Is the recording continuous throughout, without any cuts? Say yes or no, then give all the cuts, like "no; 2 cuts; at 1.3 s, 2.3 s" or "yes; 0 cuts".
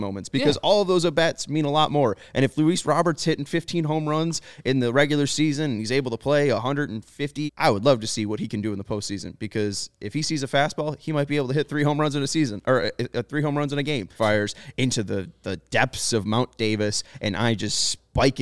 no; 2 cuts; at 7.5 s, 14.1 s